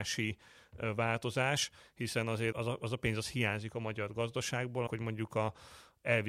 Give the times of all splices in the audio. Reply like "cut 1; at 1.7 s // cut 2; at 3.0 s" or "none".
cut 1; at 2.5 s // cut 2; at 4.9 s